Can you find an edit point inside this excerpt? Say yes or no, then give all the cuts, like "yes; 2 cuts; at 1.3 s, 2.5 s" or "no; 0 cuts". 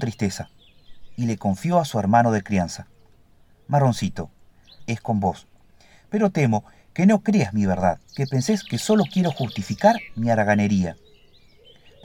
yes; 2 cuts; at 4.8 s, 8.1 s